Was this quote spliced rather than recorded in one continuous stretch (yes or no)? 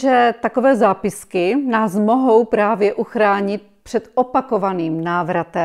no